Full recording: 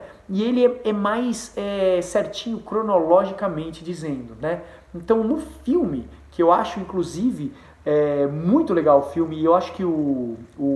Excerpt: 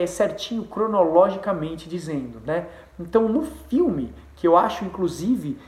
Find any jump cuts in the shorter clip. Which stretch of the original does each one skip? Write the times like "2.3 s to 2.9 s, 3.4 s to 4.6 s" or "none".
none